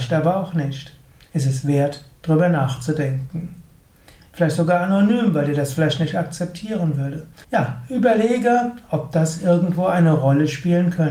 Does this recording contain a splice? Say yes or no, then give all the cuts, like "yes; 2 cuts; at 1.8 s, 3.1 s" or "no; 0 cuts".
yes; 2 cuts; at 4.2 s, 7.4 s